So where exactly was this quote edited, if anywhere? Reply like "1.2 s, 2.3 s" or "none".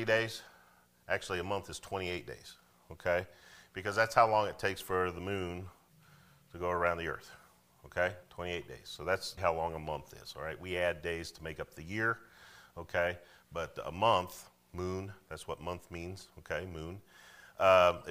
9.4 s

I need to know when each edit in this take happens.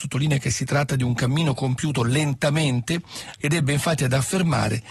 3.4 s

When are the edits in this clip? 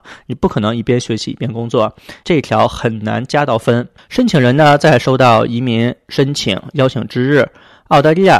2.2 s, 4.0 s

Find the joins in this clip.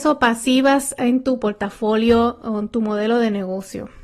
none

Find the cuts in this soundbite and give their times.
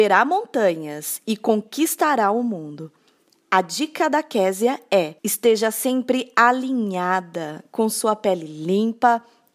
5.2 s

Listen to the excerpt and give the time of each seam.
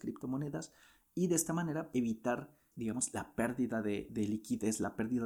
1.9 s

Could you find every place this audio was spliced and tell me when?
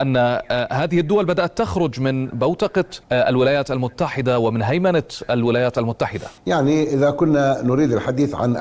3.0 s, 6.4 s

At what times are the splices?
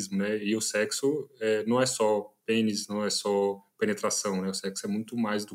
none

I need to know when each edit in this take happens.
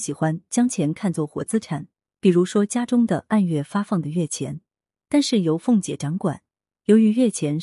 4.9 s

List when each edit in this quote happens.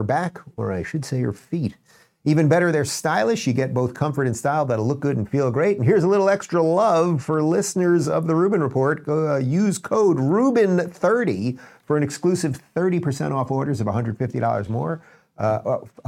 none

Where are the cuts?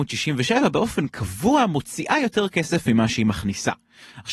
none

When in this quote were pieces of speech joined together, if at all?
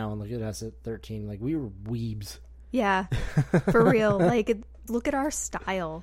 4.9 s

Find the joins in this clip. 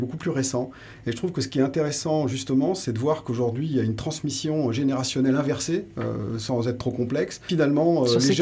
7.5 s

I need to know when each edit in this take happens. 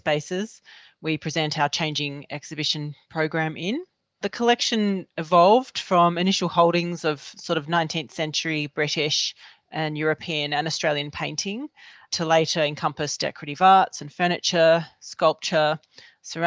none

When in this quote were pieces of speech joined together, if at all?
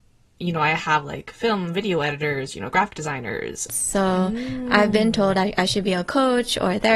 3.7 s

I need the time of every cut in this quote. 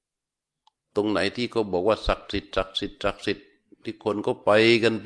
none

